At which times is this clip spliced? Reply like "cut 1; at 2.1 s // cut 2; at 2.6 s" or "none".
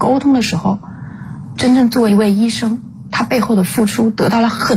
cut 1; at 1.6 s